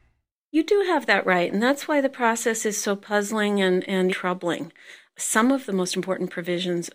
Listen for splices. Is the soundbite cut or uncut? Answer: cut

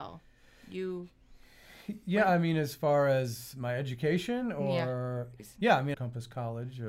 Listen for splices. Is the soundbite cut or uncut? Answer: cut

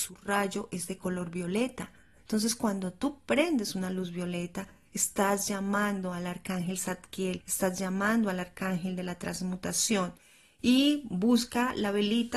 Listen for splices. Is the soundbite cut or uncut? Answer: uncut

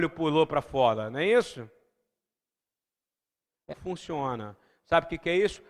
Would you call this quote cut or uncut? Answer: cut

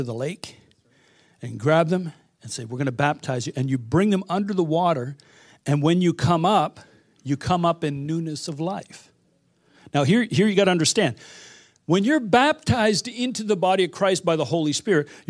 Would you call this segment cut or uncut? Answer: uncut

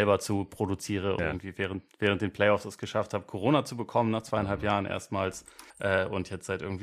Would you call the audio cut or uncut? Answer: cut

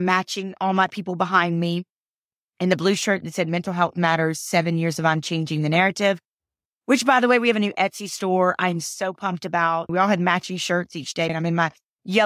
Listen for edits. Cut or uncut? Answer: cut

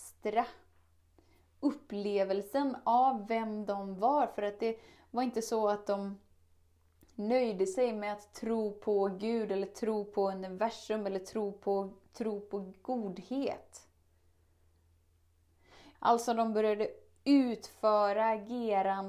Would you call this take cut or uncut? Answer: cut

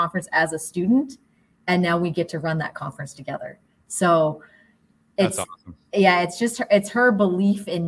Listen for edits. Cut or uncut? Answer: uncut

